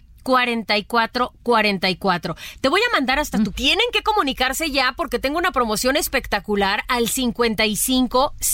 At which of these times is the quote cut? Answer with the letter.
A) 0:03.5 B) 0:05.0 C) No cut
A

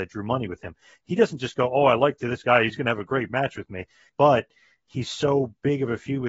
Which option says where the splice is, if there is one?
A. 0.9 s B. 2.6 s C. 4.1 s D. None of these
C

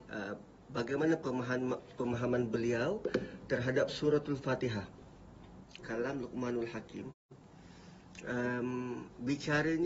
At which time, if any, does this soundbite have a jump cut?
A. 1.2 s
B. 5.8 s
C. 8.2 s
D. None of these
B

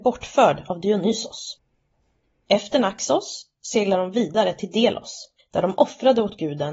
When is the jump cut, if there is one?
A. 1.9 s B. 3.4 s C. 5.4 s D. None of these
C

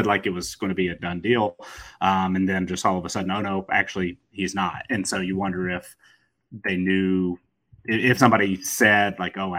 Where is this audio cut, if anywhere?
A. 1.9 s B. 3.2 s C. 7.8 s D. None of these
C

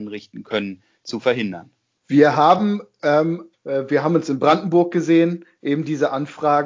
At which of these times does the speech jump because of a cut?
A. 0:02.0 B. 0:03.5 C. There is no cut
B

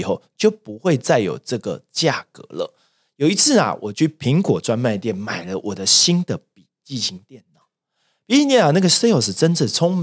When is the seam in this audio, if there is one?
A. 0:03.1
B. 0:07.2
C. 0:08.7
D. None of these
D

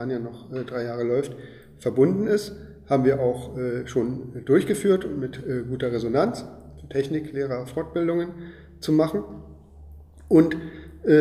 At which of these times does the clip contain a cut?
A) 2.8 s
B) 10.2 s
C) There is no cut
C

